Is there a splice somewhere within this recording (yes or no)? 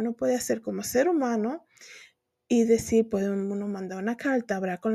no